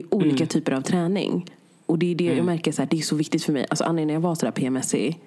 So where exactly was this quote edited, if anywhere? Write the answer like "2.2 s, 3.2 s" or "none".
none